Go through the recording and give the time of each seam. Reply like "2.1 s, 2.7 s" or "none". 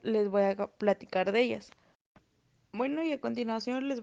none

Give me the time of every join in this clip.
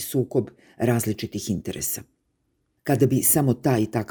2.8 s

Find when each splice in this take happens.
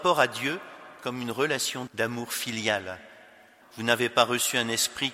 1.9 s, 3.6 s

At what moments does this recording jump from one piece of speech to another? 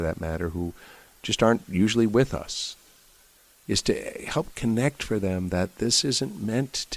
none

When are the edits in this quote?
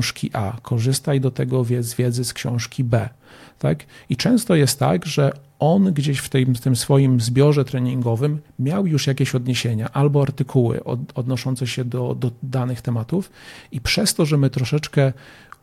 none

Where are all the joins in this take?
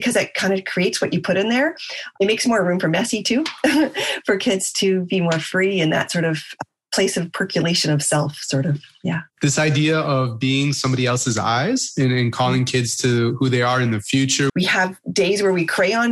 9.3 s, 14.5 s

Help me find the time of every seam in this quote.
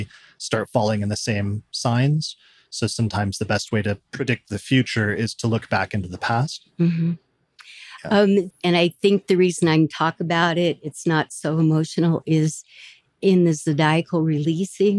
8.5 s

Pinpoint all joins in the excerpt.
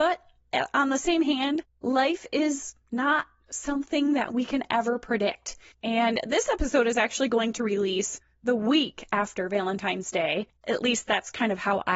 5.7 s, 10.6 s

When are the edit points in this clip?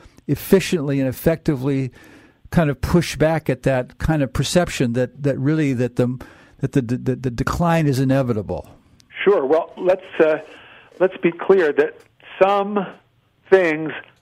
9.8 s

